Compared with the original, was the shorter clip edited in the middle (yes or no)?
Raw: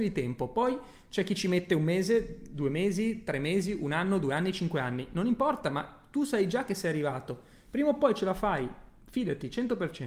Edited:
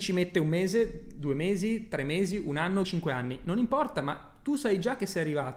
yes